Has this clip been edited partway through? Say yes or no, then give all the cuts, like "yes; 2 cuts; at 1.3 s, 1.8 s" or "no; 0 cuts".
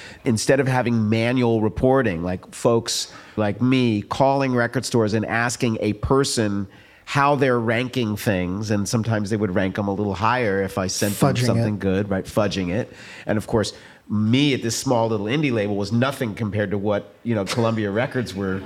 yes; 2 cuts; at 3.4 s, 17.5 s